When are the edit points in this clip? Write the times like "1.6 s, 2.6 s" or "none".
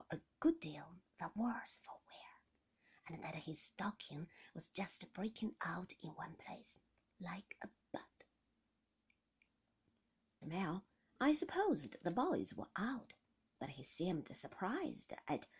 10.4 s